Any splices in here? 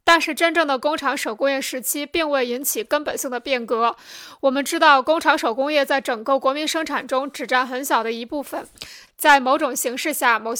yes; 1 cut; at 9.1 s

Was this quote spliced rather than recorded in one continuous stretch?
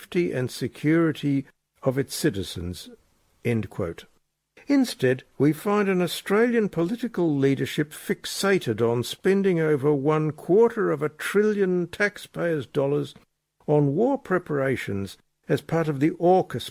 no; 0 cuts

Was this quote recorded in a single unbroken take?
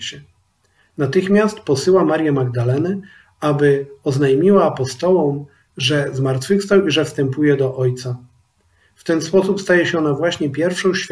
yes; 0 cuts

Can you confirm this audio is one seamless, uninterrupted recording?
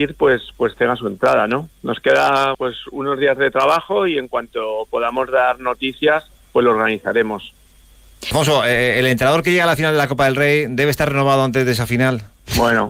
no; 1 cut; at 2.5 s

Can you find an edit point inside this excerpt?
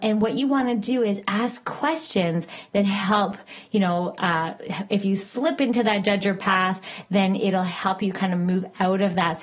no; 0 cuts

